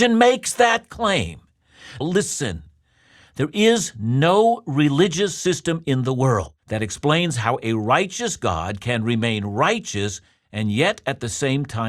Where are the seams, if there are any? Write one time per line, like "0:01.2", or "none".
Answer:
0:02.0
0:06.6